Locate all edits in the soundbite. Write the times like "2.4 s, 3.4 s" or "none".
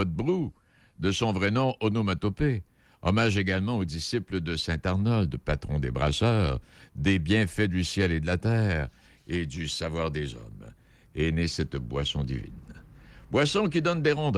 none